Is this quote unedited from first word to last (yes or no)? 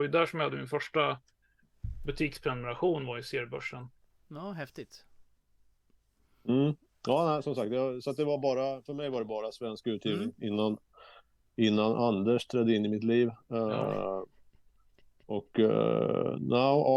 yes